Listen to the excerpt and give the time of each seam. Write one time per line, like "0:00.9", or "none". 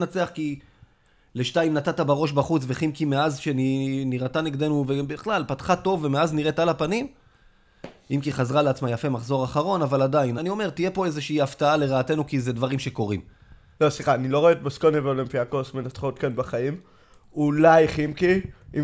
0:10.4
0:13.8